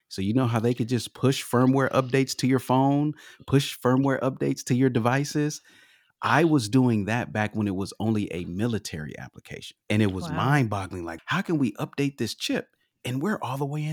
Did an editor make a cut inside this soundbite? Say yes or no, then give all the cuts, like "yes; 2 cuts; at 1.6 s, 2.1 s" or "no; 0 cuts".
yes; 2 cuts; at 9.8 s, 11.2 s